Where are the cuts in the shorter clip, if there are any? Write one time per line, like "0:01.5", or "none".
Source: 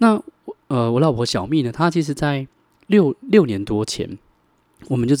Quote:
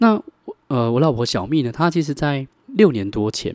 0:02.6